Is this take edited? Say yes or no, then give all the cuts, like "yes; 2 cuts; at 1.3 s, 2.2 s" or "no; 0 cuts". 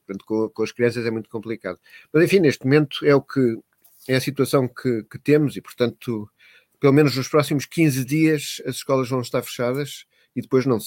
no; 0 cuts